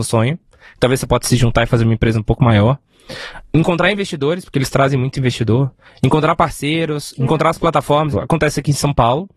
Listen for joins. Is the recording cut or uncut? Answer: cut